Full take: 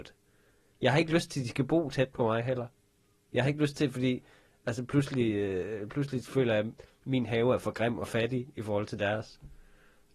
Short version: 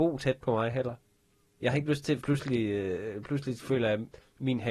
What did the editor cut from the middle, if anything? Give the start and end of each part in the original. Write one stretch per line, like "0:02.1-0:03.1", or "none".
0:03.9-0:04.9